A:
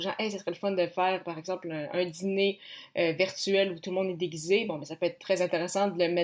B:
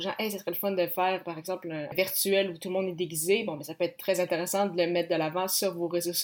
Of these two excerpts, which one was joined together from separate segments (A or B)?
B